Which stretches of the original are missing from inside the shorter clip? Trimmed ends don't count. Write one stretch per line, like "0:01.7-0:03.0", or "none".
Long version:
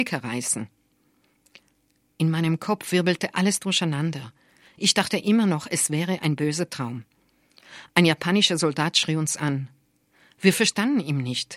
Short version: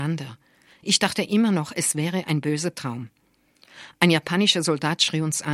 none